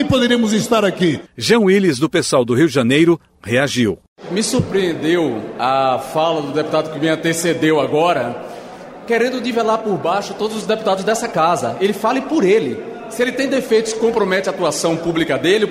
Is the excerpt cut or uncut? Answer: uncut